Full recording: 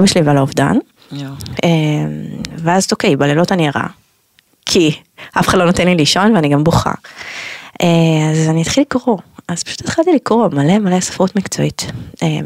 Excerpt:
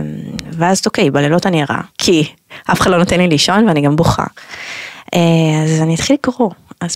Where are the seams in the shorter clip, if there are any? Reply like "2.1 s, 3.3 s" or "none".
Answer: 1.9 s